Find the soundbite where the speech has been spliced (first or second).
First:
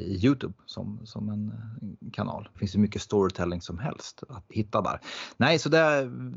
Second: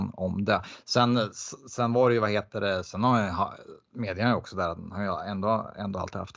first